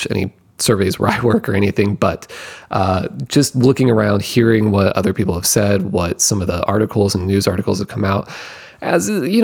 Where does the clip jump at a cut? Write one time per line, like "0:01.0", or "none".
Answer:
none